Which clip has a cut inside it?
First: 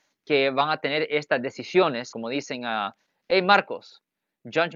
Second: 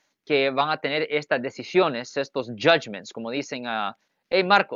first; 1 cut; at 2.1 s

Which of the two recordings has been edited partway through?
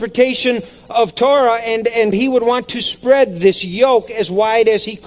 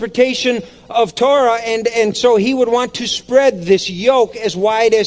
first; 1 cut; at 2.1 s

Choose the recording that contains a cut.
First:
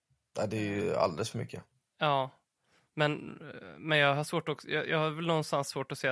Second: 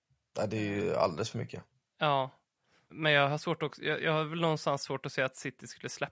second; 1 cut; at 2.9 s

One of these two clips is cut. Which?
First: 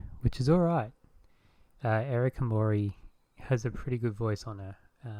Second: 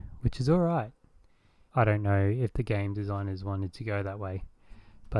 second; 1 cut; at 1.7 s

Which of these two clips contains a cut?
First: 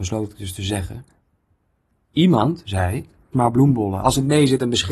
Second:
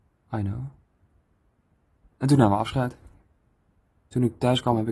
first; 1 cut; at 3.3 s

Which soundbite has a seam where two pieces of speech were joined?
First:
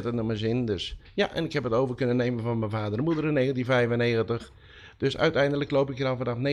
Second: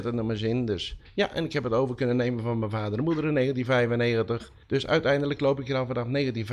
second; 1 cut; at 4.6 s

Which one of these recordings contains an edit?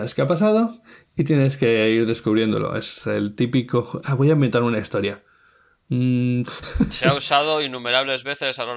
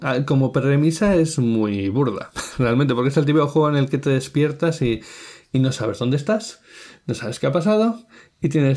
first; 2 cuts; at 4.0 s, 6.5 s

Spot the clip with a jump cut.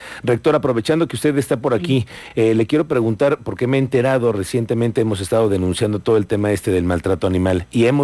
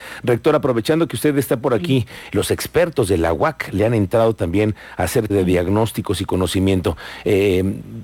second; 2 cuts; at 2.3 s, 5.3 s

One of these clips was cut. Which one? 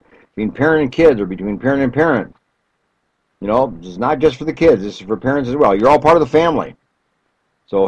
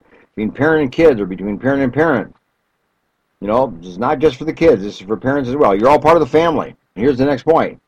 second; 1 cut; at 7.0 s

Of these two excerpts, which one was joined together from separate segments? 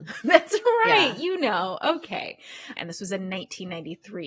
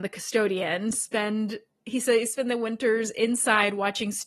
first; 1 cut; at 2.8 s

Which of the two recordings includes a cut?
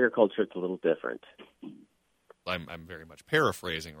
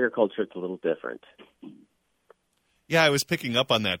first; 1 cut; at 2.5 s

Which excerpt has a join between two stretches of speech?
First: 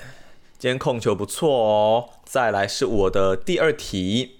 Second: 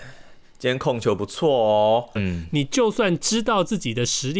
second; 1 cut; at 2.2 s

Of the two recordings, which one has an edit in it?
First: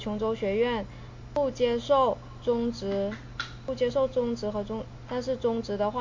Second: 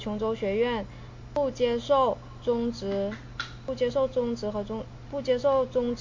first; 1 cut; at 5.1 s

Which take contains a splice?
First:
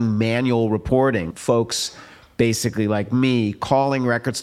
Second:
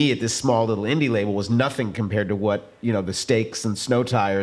first; 1 cut; at 1.3 s

